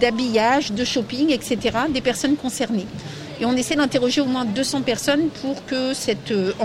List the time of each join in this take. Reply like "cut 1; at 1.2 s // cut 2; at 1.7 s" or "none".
none